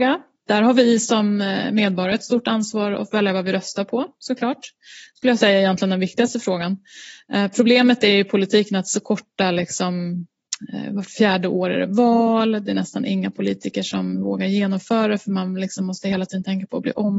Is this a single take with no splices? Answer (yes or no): yes